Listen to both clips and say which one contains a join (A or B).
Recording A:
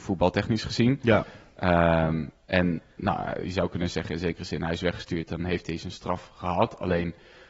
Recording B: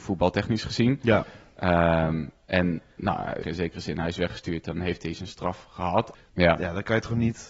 B